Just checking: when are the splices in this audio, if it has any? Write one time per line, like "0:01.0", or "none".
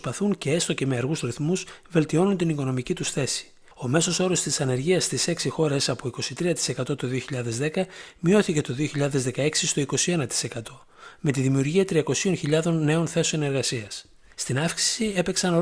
none